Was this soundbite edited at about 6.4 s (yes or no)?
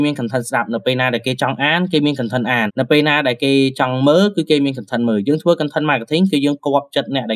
no